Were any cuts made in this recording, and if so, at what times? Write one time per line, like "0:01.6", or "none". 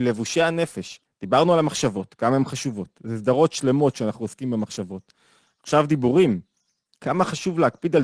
0:01.0